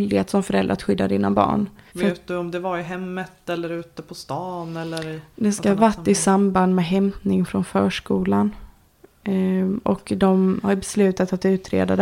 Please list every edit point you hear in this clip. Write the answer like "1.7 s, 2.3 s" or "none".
1.9 s

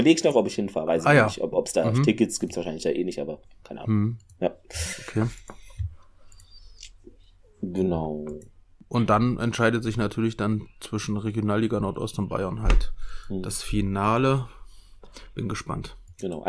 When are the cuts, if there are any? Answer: none

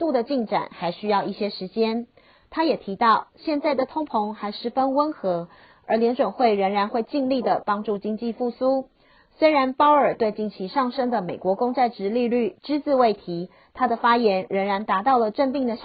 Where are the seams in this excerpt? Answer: none

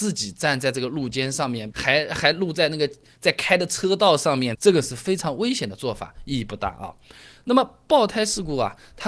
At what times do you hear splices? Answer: 1.7 s, 4.5 s

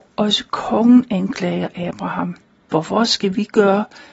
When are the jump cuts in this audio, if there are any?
2.6 s

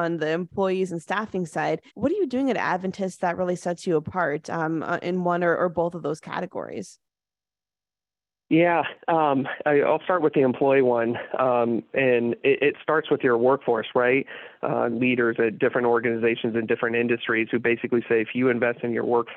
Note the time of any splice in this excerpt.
1.9 s, 14.9 s

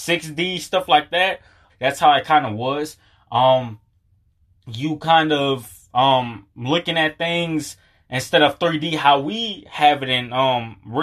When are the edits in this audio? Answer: 1.7 s

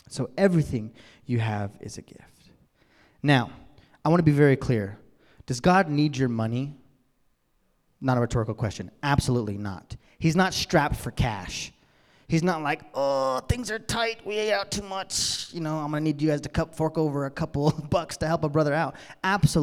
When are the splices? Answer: none

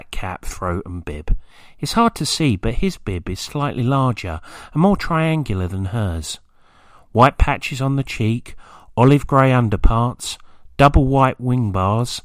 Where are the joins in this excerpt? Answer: none

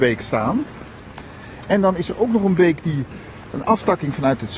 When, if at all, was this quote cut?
none

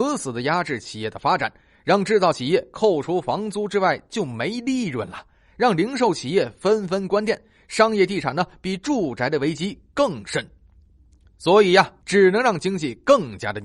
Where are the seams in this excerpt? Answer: 12.0 s

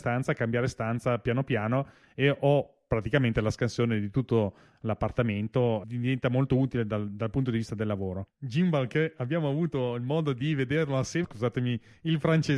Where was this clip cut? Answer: 8.3 s, 11.2 s

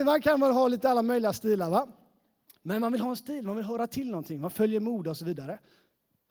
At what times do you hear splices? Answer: none

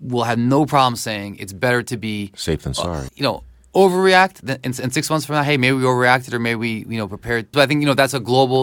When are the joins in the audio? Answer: 3.1 s, 7.5 s

